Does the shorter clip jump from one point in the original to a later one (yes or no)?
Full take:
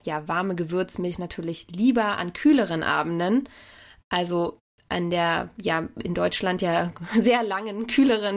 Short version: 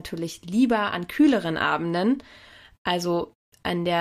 no